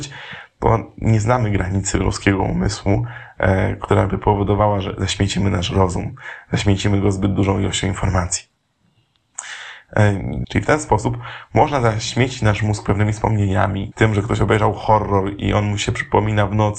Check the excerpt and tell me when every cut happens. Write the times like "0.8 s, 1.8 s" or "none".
10.4 s, 13.9 s